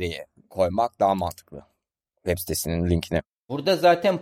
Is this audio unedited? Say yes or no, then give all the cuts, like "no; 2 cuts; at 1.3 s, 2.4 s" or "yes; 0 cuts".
yes; 0 cuts